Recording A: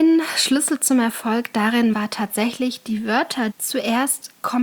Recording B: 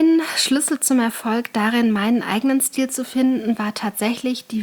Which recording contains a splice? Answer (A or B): A